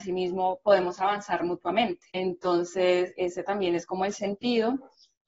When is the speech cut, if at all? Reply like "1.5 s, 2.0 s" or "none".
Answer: 2.1 s, 3.2 s